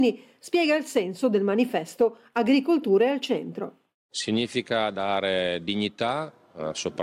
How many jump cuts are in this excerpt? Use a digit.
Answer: 0